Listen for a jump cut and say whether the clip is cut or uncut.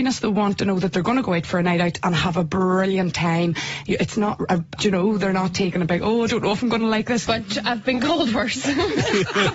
cut